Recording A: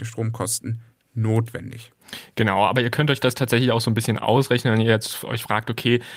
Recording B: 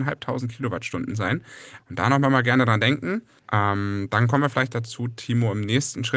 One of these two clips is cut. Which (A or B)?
B